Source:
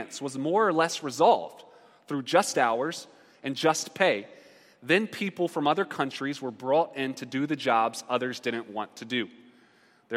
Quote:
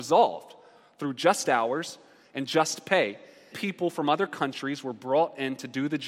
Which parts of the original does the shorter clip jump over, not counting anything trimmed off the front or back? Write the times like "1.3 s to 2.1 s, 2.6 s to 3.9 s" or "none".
4.6 s to 5.1 s